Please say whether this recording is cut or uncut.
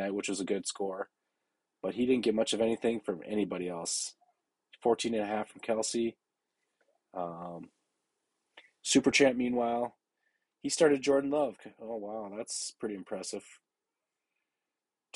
uncut